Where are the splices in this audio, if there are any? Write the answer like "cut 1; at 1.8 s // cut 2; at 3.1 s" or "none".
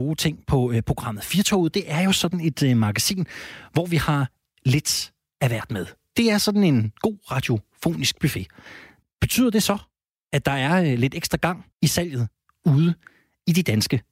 cut 1; at 9.0 s // cut 2; at 11.7 s